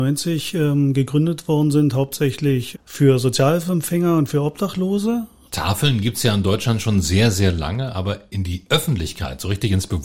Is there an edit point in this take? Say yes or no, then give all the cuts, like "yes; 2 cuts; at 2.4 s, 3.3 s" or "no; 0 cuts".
yes; 2 cuts; at 2.7 s, 5.5 s